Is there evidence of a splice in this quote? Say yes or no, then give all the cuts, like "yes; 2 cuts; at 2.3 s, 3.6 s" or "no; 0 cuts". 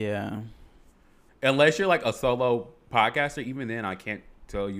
yes; 1 cut; at 1.3 s